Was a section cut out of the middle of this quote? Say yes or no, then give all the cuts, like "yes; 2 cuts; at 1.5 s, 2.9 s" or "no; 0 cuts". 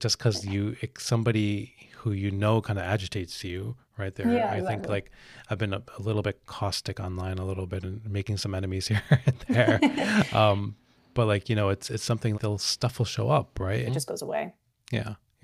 yes; 2 cuts; at 12.3 s, 13.9 s